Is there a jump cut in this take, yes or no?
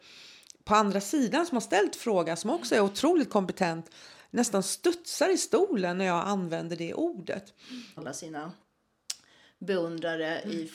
yes